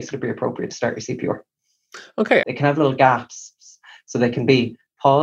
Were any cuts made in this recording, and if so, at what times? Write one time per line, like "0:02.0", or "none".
0:02.4